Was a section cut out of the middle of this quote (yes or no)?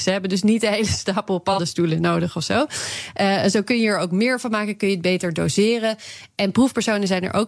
no